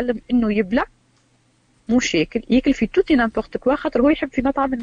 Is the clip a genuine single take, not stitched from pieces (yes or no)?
yes